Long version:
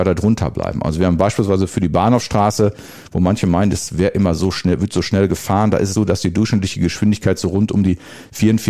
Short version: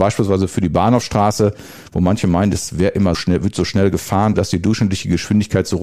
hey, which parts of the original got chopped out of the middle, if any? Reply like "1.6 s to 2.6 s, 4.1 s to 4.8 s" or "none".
4.3 s to 4.5 s, 5.7 s to 6.1 s